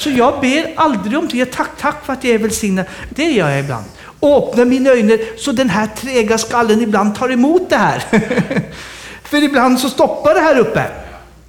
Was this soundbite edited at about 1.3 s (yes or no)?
no